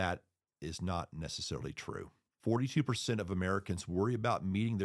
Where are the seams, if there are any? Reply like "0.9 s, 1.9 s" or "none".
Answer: none